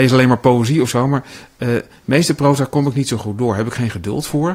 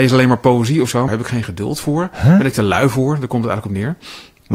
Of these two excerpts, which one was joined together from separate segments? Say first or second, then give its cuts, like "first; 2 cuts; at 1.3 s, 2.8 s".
second; 1 cut; at 1.1 s